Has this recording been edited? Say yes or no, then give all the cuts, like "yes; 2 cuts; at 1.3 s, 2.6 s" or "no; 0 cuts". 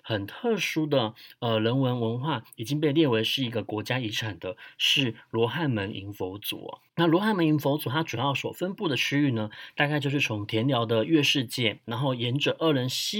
yes; 1 cut; at 6.9 s